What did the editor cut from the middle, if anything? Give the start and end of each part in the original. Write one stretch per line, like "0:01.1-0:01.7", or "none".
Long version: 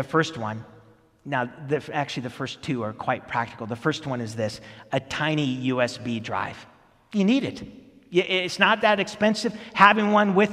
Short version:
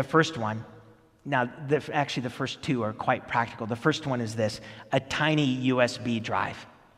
none